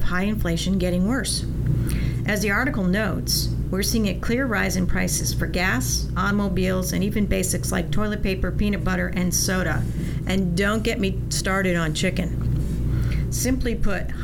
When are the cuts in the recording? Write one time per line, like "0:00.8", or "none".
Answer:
none